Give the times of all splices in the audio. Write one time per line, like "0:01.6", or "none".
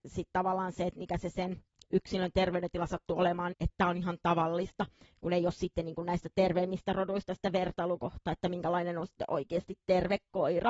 0:03.5